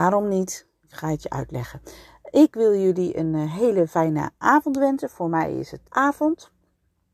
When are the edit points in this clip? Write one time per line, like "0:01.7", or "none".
0:05.9